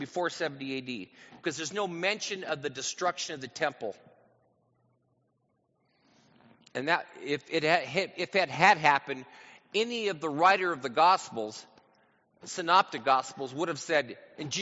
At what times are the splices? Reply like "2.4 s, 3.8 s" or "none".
none

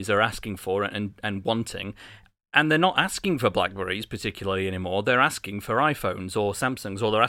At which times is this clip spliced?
none

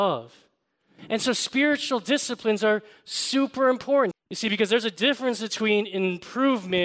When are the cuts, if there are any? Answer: 4.1 s

